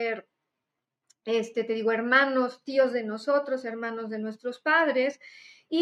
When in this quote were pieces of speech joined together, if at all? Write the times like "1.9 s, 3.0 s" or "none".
none